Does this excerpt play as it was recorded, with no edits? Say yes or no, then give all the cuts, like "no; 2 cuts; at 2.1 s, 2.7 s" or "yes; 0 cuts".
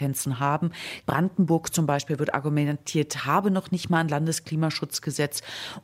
no; 1 cut; at 1.0 s